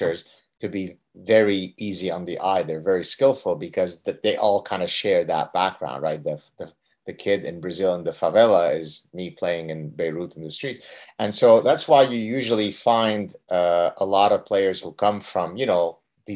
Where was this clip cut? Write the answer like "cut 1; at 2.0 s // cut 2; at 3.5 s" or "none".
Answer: cut 1; at 11.0 s